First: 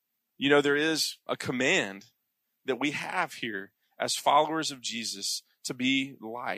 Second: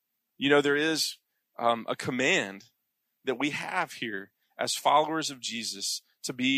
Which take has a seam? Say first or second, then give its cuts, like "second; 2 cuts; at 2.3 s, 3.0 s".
first; 1 cut; at 1.3 s